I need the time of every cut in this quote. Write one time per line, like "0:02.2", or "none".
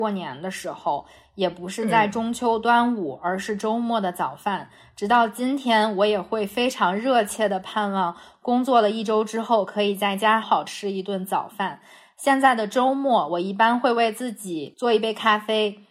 0:10.4